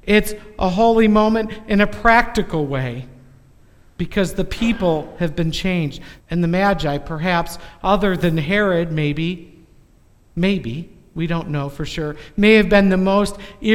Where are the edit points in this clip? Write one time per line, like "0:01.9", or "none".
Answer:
0:06.2